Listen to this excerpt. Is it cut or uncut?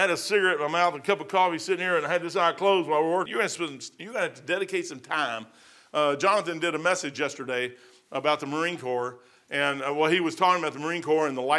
cut